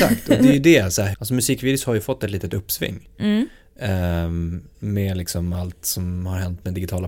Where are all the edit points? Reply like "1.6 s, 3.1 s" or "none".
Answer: 1.1 s